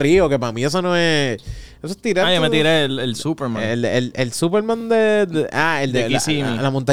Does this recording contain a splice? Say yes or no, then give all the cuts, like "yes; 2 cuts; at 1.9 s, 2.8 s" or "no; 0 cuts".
no; 0 cuts